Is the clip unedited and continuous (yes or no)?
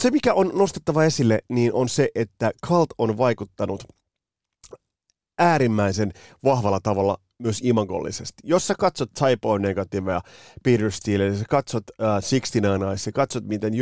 yes